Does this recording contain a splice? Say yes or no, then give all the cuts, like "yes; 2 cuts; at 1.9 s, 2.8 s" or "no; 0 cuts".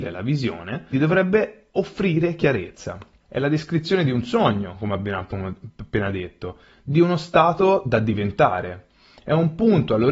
yes; 2 cuts; at 0.9 s, 3.2 s